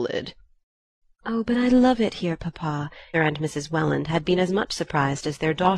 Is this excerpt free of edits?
no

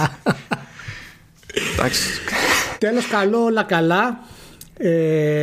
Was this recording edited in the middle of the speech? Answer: no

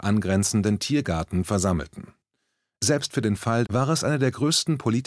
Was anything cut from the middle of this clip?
yes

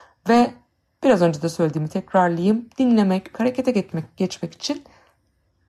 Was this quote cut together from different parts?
yes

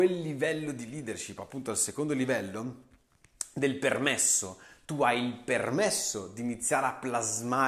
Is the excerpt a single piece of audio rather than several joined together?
yes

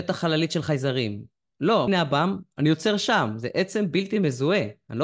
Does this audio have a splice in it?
yes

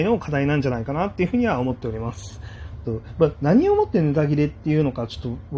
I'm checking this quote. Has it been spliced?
yes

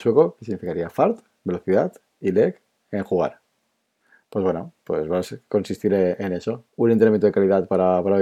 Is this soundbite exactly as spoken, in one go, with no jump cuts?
no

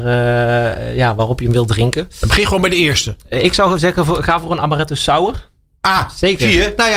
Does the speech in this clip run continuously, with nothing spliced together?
no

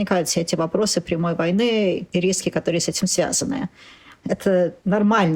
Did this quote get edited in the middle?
no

